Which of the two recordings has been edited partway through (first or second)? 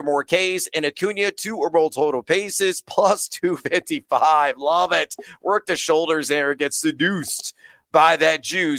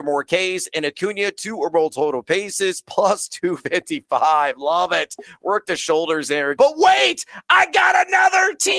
second